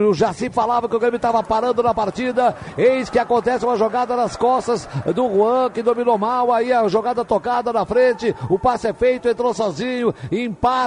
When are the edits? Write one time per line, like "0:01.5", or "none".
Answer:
none